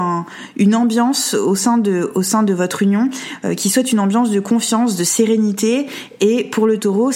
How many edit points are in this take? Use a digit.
0